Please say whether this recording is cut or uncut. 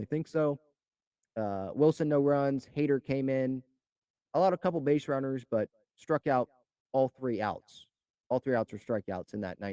uncut